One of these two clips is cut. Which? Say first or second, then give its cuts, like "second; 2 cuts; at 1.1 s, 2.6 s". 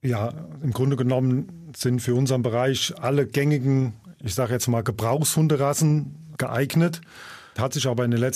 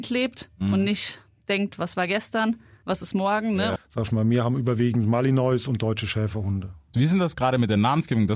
second; 1 cut; at 3.8 s